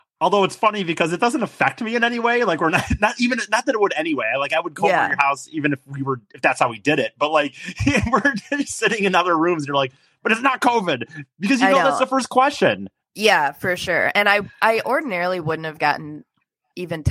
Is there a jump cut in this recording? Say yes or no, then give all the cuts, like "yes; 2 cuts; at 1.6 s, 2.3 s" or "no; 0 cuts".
no; 0 cuts